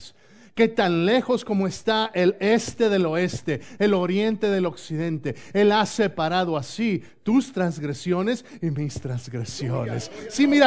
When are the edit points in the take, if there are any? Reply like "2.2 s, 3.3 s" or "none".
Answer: none

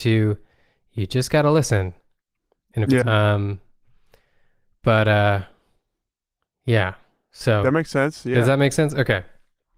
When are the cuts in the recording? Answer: 3.0 s

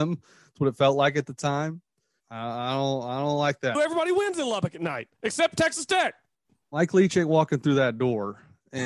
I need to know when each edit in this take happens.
2.2 s, 3.7 s

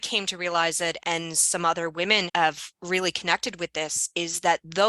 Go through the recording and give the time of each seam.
1.0 s, 2.3 s

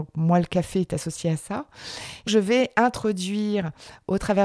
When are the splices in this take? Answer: 2.3 s

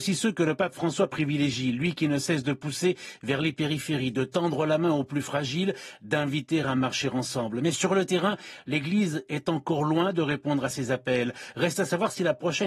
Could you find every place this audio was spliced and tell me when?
none

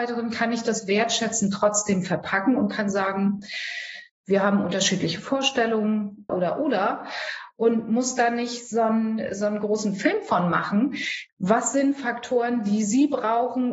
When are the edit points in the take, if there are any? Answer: 6.3 s, 11.3 s

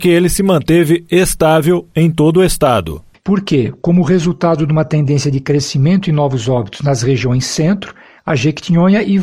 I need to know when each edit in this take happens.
3.2 s, 8.2 s

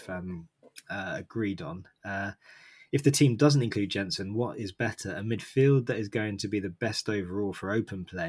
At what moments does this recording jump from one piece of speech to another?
none

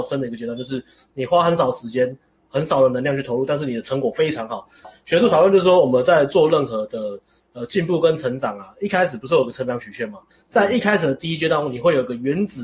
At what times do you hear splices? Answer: 4.8 s

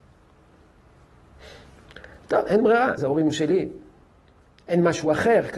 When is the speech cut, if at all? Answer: 3.0 s

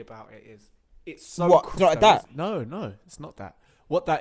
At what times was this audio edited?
1.8 s

